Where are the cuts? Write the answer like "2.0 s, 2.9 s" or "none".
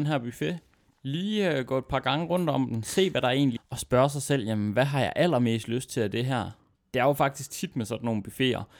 3.6 s